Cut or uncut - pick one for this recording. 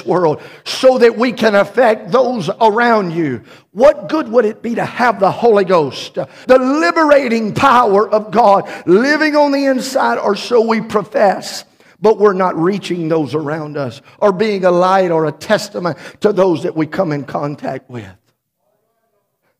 cut